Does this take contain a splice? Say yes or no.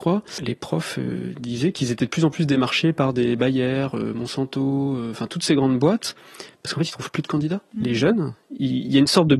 no